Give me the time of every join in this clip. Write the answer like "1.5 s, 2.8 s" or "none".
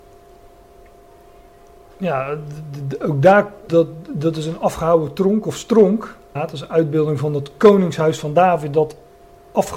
3.7 s, 6.4 s